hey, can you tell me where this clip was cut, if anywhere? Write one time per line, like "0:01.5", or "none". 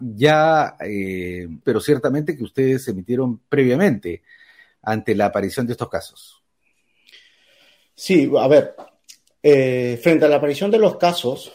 0:01.6